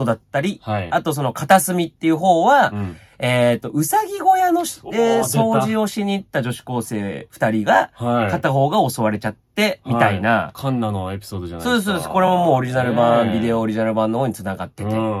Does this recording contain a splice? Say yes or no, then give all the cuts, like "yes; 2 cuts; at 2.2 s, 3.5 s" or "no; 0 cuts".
no; 0 cuts